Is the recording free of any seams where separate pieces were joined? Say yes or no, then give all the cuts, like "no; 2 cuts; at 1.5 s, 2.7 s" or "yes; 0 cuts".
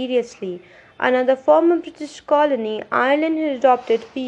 yes; 0 cuts